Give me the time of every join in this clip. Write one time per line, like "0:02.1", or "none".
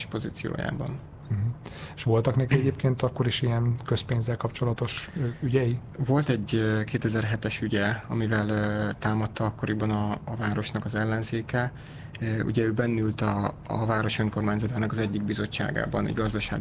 none

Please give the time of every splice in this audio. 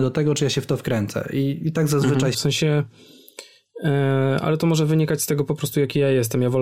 0:02.3

